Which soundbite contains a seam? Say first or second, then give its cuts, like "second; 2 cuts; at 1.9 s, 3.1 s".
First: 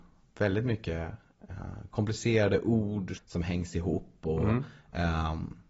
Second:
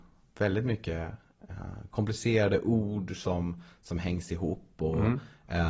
first; 1 cut; at 3.2 s